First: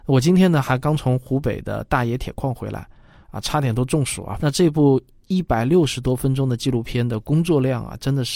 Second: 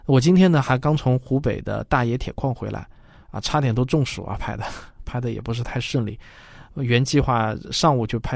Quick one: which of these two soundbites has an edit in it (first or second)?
first